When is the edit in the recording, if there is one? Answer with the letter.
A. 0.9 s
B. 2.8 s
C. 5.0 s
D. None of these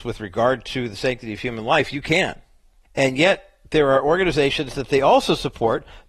B